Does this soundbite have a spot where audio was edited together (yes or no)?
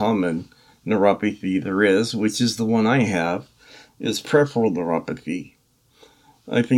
no